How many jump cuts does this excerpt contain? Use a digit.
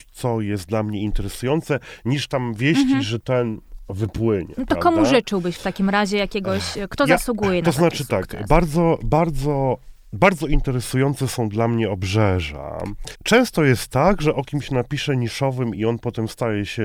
1